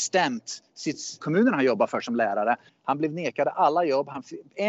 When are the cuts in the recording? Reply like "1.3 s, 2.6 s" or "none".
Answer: 1.2 s, 2.7 s